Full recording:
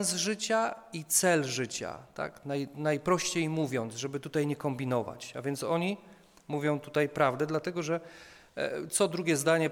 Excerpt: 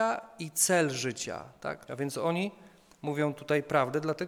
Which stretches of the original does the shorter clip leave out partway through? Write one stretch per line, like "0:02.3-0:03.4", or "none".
0:02.4-0:05.3